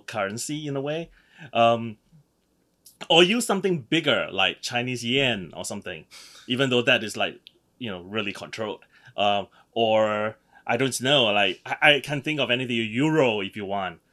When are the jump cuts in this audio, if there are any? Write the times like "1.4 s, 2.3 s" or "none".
none